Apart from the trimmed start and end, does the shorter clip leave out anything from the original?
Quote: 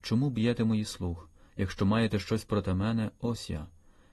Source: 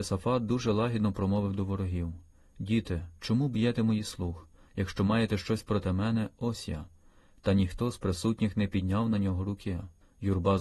no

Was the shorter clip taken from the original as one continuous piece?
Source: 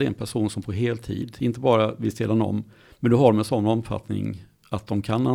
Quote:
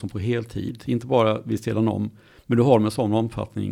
yes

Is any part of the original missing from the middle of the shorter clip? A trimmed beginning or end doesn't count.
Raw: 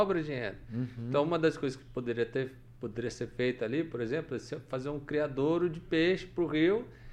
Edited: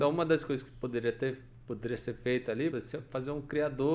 yes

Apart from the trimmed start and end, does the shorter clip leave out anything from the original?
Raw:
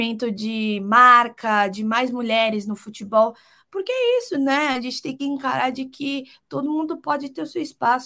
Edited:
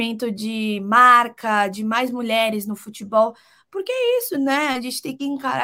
no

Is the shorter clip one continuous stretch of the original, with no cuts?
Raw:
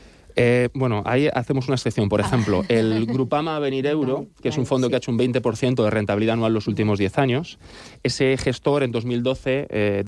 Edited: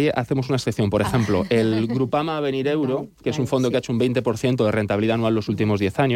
yes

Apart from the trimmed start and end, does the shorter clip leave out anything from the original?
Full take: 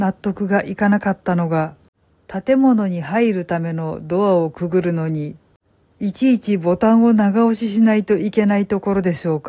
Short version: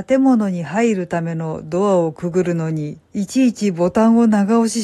yes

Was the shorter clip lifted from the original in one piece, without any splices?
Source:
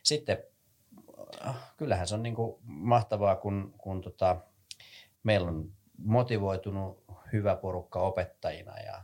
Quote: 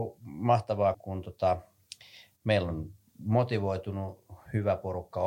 no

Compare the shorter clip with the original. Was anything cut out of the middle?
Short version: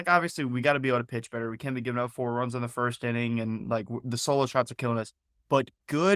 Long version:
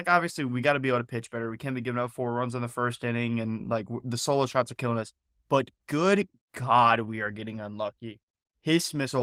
no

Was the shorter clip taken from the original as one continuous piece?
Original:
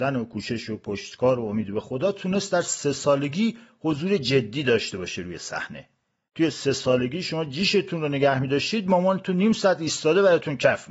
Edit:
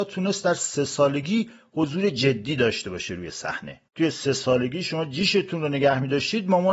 no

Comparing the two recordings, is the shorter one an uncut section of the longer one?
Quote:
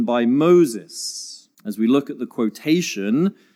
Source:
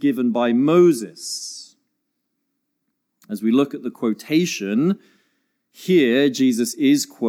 no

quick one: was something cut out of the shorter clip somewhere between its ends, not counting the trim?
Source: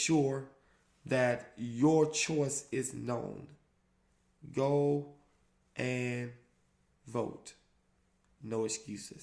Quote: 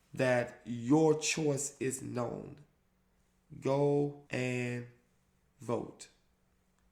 yes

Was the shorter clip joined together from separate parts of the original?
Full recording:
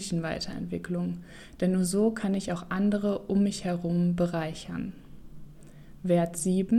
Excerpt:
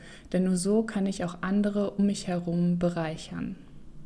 yes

